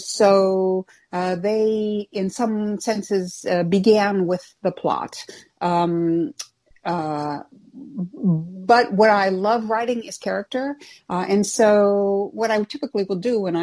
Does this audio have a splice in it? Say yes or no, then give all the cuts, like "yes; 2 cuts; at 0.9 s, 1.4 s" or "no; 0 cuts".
no; 0 cuts